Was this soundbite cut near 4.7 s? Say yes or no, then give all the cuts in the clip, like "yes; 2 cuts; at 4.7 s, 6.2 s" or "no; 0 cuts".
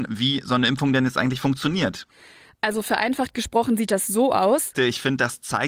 yes; 1 cut; at 4.7 s